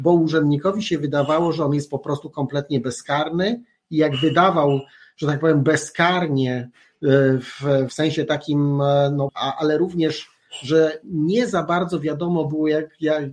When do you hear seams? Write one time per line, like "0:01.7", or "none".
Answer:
0:07.9
0:09.3